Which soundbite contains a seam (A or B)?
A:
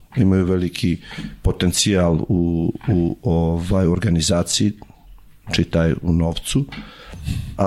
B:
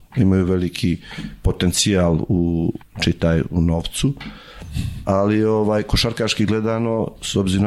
B